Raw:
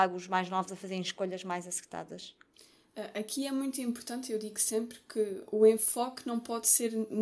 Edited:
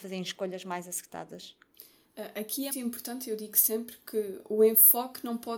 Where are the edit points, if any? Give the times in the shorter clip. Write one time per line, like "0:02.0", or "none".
0:02.7